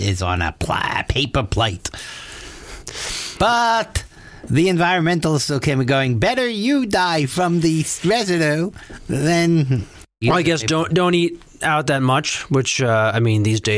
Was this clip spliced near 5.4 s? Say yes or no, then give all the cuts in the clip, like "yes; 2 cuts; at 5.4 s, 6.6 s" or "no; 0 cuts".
no; 0 cuts